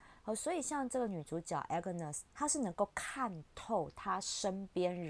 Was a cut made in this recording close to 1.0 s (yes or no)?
no